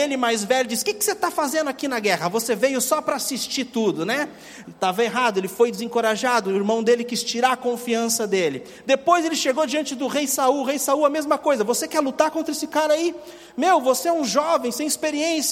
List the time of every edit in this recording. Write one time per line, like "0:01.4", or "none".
0:04.6